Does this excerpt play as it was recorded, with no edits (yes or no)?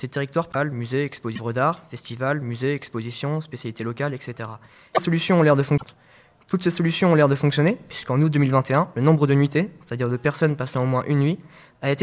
no